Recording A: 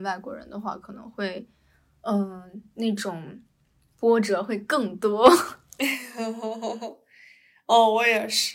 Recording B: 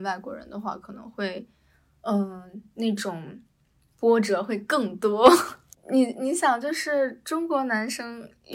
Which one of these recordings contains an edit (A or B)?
B